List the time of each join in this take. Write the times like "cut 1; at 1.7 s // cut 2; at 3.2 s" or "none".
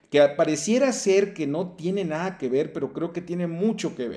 none